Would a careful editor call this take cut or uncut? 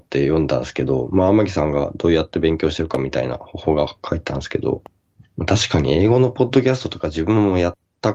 uncut